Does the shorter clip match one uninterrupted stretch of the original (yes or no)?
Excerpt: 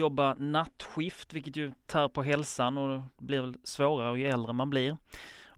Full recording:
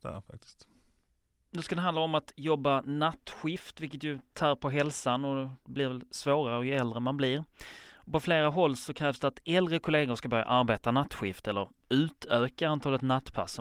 yes